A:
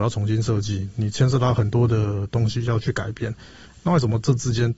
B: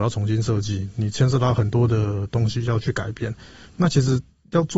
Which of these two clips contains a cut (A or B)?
A